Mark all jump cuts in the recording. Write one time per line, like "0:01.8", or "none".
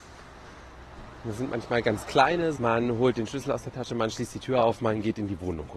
0:02.6